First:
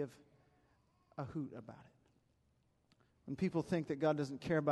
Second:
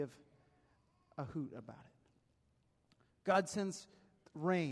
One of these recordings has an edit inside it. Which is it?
first; 1 cut; at 3.1 s

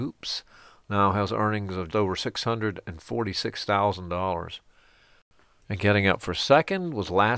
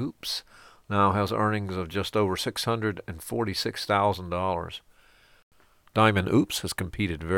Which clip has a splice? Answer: first; 2 cuts; at 1.9 s, 5.6 s

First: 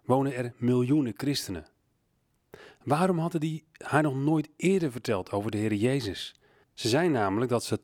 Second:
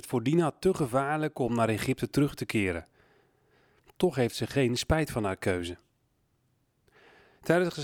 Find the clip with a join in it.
first; 1 cut; at 6.6 s

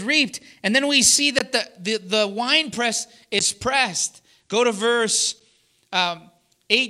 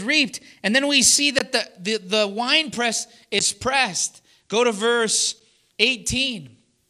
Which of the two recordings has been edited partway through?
second; 1 cut; at 5.7 s

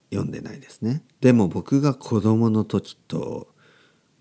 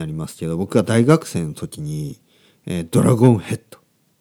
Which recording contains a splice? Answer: first; 1 cut; at 1.1 s

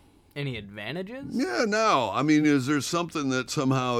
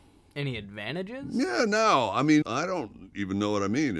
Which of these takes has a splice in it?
second; 1 cut; at 2.4 s

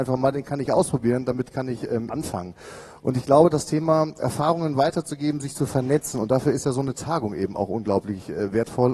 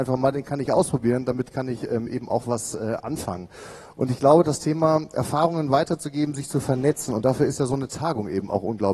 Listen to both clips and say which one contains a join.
first; 1 cut; at 2.1 s

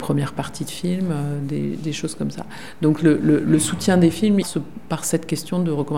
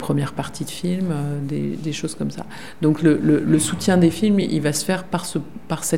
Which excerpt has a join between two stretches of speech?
first; 1 cut; at 4.4 s

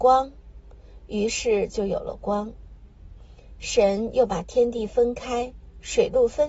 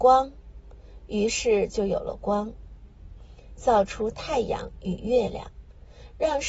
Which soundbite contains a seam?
second; 1 cut; at 3.6 s

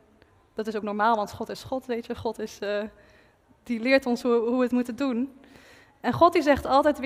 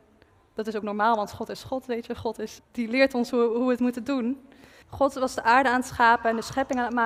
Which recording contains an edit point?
second; 2 cuts; at 2.6 s, 4.8 s

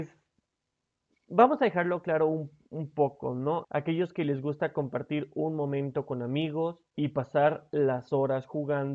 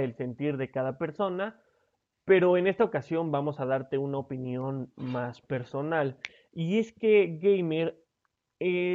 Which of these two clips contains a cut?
first; 2 cuts; at 3.6 s, 6.9 s

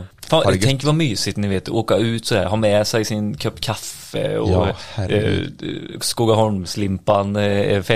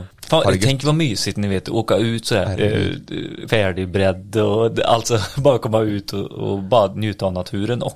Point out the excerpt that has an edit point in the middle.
second; 2 cuts; at 2.4 s, 3.5 s

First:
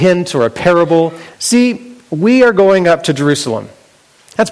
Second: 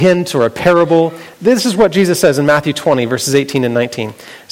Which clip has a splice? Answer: first; 1 cut; at 1.3 s

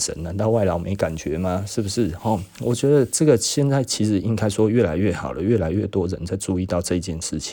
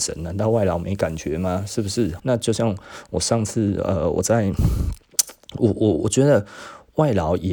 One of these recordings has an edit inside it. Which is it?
second; 1 cut; at 2.2 s

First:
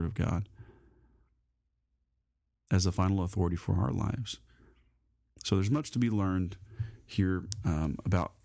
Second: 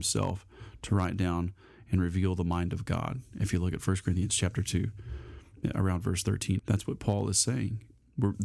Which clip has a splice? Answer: second; 1 cut; at 6.6 s

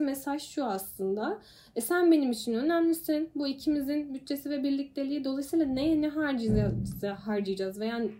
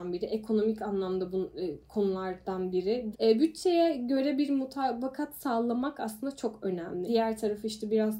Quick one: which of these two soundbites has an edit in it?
second; 2 cuts; at 3.1 s, 7.1 s

